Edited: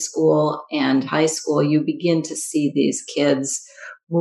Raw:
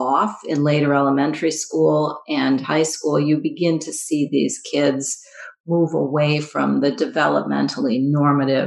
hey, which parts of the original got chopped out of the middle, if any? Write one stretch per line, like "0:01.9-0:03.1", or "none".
none